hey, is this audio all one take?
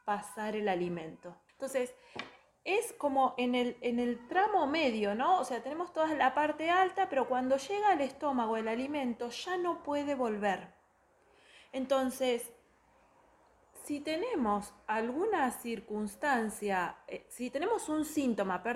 no; 1 cut; at 1.5 s

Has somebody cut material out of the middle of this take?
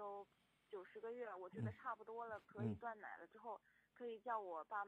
no; 0 cuts

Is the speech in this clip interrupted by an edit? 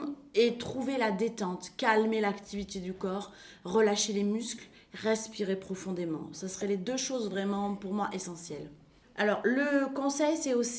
no; 0 cuts

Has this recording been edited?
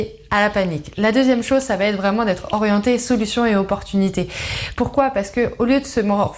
yes; 1 cut; at 4.7 s

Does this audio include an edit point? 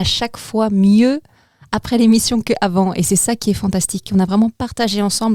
no; 0 cuts

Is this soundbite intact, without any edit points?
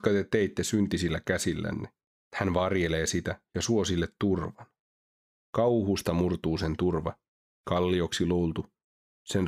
no; 2 cuts; at 2.1 s, 5.5 s

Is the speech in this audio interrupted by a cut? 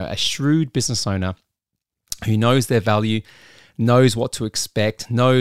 no; 0 cuts

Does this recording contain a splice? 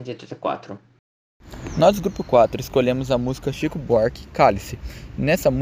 no; 0 cuts

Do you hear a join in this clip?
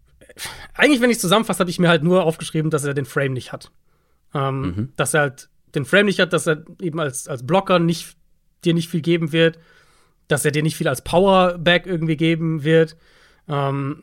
no; 0 cuts

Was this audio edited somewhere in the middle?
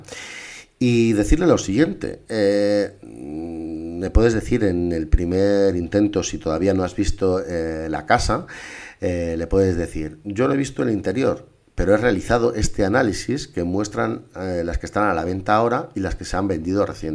no; 0 cuts

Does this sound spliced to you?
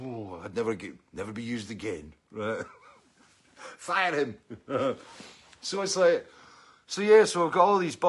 no; 0 cuts

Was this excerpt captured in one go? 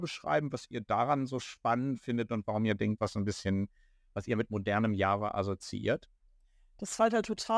no; 1 cut; at 3.0 s

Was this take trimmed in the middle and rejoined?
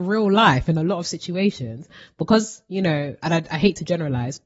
no; 0 cuts

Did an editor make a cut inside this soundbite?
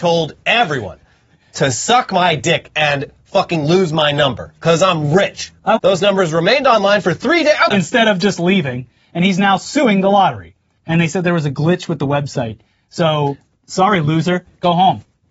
yes; 3 cuts; at 5.8 s, 7.7 s, 10.8 s

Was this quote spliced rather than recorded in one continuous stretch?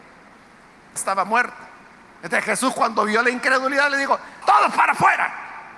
yes; 2 cuts; at 1.0 s, 4.4 s

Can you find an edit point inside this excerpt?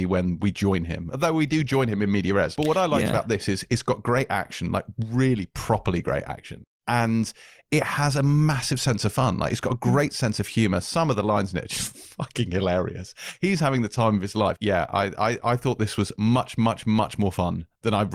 yes; 2 cuts; at 2.5 s, 14.5 s

